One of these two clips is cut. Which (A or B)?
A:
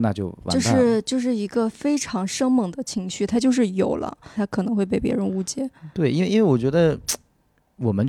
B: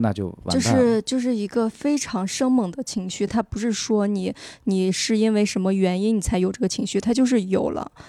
A